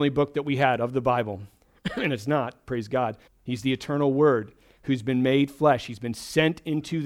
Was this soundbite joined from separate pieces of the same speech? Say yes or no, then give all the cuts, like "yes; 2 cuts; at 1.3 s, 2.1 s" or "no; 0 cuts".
yes; 1 cut; at 3.3 s